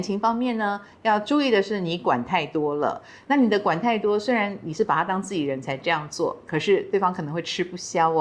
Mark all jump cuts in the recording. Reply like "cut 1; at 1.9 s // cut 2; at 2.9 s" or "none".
none